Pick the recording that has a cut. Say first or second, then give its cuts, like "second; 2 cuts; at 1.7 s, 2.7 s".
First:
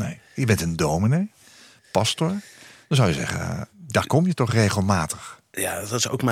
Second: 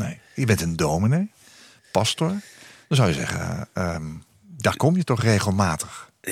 first; 1 cut; at 3.7 s